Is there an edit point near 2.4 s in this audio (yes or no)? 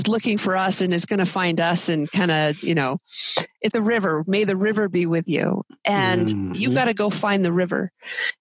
no